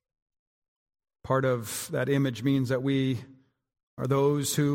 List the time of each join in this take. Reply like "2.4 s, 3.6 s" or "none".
none